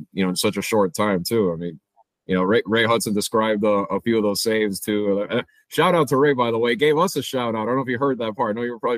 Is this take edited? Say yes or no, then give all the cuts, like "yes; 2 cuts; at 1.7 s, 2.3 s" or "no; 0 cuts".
no; 0 cuts